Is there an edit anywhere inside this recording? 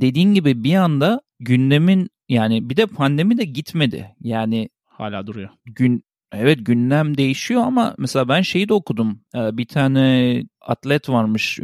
no; 0 cuts

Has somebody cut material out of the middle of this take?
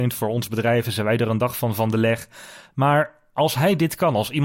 no; 0 cuts

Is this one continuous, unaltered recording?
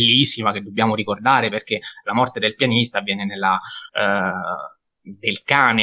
no; 1 cut; at 3.9 s

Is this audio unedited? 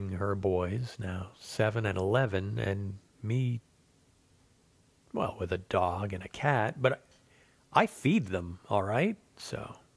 yes; 0 cuts

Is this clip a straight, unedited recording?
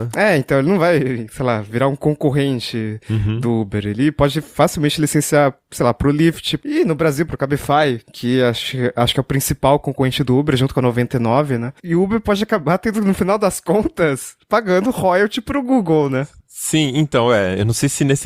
no; 2 cuts; at 6.6 s, 11.8 s

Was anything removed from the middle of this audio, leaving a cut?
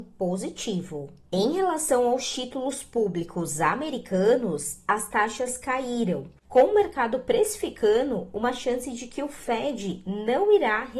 no; 0 cuts

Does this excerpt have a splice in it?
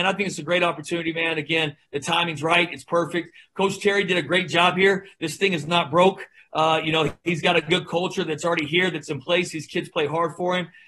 no; 0 cuts

